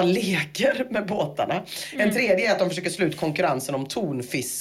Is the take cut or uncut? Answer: uncut